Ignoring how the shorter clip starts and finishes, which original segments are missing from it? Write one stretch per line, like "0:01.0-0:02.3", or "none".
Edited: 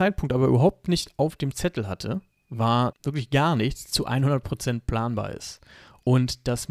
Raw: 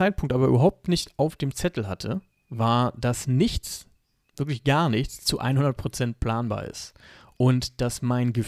0:02.9-0:04.3